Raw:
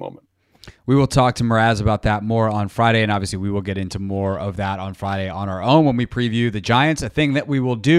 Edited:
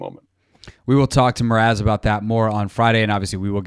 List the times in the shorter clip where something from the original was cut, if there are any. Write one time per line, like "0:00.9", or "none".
none